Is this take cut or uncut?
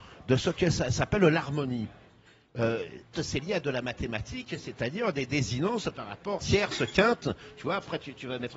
cut